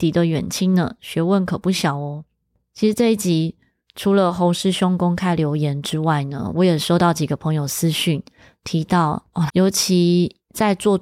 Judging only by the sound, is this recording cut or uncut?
cut